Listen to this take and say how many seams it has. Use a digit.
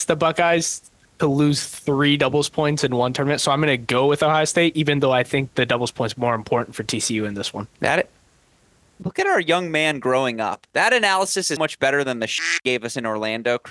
1